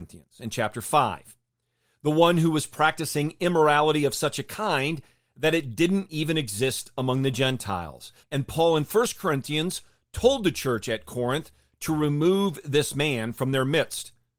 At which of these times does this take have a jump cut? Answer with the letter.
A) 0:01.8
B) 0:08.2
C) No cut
B